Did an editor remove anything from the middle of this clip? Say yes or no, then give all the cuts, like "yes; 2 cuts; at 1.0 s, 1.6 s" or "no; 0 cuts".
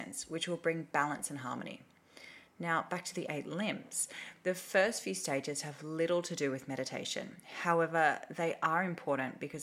no; 0 cuts